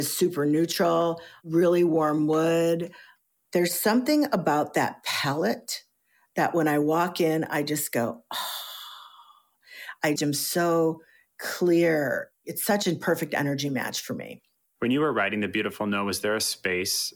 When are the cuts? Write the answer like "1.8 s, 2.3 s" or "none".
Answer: 10.2 s, 14.6 s

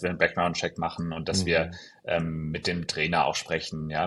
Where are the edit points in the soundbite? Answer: none

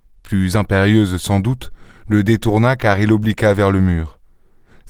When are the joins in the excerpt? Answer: none

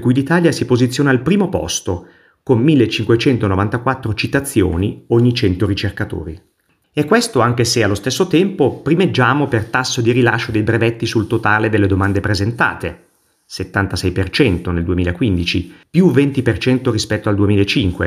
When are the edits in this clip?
6.8 s

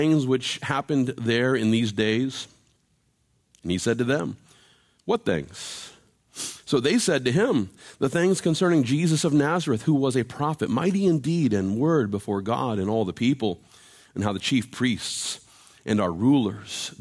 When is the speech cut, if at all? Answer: none

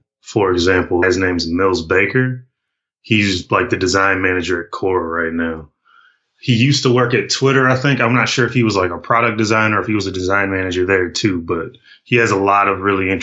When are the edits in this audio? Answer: 1.0 s

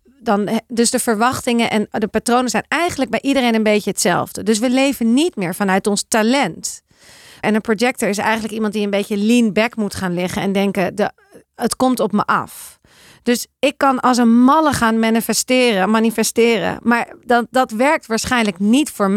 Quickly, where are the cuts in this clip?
7.4 s

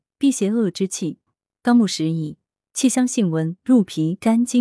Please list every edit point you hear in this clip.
1.3 s, 3.6 s

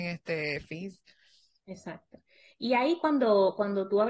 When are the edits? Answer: none

